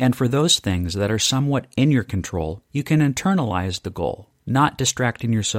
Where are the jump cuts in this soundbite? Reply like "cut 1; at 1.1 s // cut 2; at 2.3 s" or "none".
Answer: cut 1; at 2.6 s // cut 2; at 4.4 s